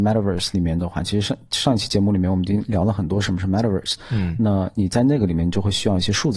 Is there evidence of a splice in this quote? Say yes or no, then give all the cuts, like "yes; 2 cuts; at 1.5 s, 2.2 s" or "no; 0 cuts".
no; 0 cuts